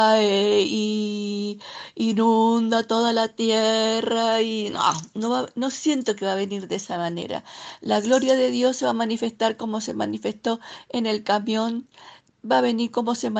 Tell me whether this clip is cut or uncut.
uncut